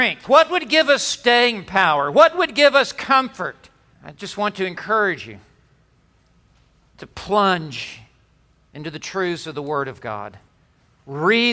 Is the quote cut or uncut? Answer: cut